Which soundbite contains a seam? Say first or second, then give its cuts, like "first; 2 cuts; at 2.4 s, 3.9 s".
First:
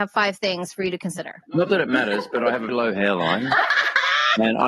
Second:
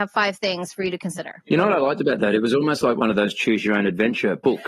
first; 2 cuts; at 1.4 s, 2.7 s